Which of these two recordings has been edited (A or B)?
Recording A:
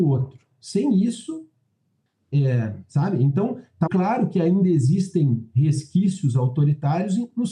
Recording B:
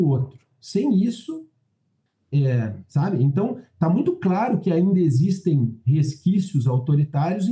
A